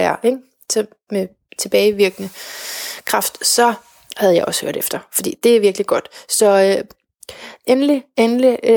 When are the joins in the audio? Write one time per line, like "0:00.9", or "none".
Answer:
none